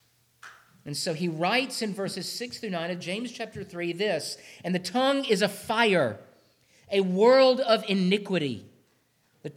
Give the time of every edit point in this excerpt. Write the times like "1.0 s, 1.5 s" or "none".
none